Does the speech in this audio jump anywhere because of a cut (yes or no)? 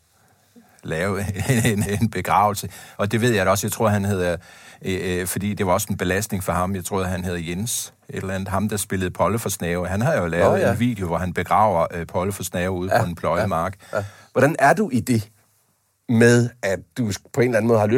yes